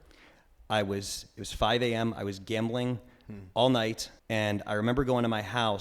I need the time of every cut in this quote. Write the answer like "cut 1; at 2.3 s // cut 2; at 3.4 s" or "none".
cut 1; at 4.2 s

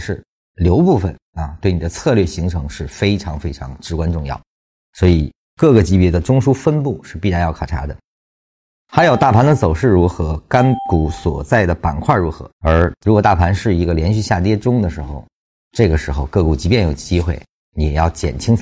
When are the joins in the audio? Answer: cut 1; at 12.5 s

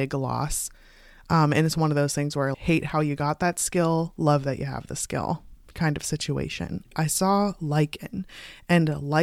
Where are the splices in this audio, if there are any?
cut 1; at 2.5 s // cut 2; at 6.9 s

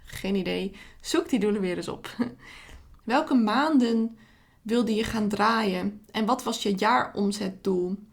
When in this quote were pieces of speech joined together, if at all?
cut 1; at 3.0 s

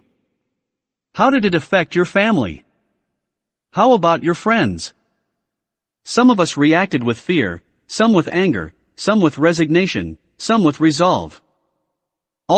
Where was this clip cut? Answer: none

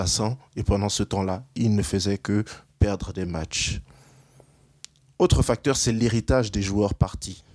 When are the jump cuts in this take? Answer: none

